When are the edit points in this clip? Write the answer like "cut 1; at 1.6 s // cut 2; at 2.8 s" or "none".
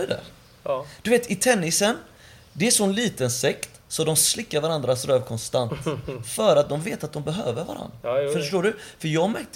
none